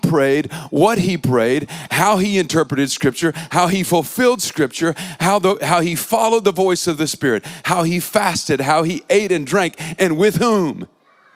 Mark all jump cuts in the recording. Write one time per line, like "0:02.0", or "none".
none